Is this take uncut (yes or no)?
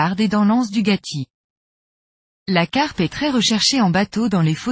yes